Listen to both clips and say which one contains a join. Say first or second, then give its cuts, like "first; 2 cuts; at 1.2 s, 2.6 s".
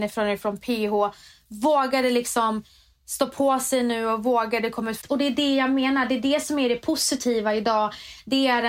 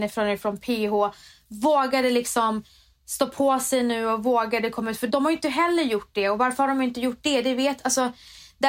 first; 1 cut; at 5.0 s